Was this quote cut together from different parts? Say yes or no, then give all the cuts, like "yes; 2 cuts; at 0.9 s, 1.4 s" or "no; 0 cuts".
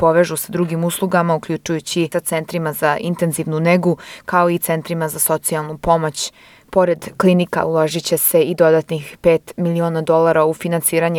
yes; 1 cut; at 6.6 s